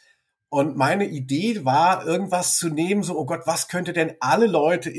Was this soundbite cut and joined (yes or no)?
no